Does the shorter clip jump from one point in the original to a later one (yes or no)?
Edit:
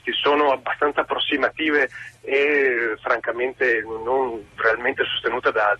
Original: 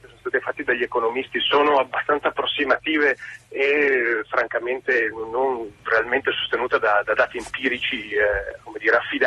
no